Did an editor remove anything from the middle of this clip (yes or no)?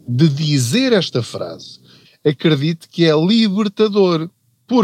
yes